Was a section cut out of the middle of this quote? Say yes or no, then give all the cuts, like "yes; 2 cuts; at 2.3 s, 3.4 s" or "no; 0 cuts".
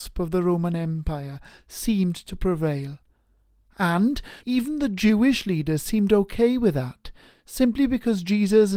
yes; 1 cut; at 4.4 s